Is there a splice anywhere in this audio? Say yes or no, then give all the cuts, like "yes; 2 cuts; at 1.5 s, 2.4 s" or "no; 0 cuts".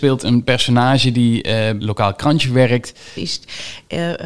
yes; 2 cuts; at 1.8 s, 3.2 s